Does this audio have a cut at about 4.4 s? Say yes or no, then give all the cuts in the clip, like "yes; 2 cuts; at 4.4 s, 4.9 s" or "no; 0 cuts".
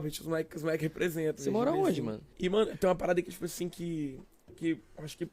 no; 1 cut; at 2.3 s